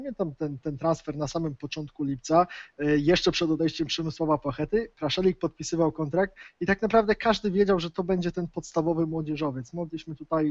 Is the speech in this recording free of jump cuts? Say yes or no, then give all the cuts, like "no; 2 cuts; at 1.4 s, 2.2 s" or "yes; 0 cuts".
yes; 0 cuts